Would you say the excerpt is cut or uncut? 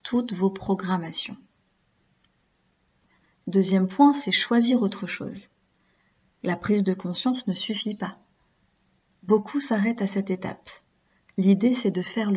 uncut